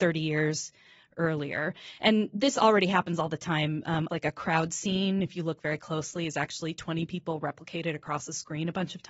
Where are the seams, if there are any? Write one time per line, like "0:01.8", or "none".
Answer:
0:04.1